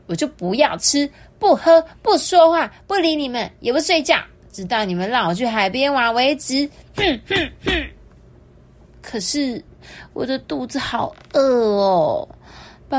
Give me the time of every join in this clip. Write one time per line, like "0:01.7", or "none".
none